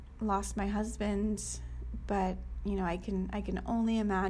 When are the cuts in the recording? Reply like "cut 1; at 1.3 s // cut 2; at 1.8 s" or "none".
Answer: none